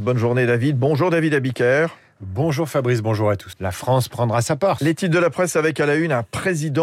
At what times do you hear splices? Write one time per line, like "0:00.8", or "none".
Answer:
0:03.5
0:04.8